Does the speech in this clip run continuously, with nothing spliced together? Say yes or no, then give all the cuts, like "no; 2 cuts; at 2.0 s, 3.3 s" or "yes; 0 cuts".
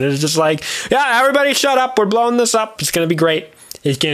no; 1 cut; at 2.8 s